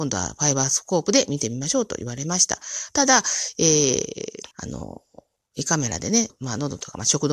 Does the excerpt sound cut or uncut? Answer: cut